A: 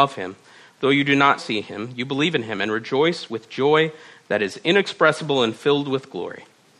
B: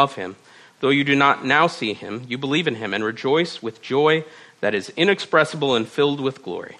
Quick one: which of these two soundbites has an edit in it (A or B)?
A